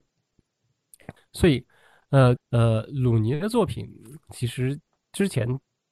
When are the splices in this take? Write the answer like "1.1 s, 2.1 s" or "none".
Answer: 1.2 s, 2.4 s